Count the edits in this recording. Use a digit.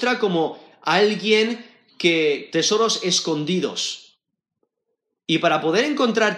1